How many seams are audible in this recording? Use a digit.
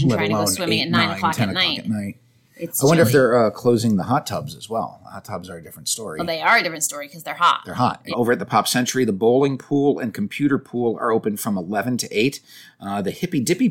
1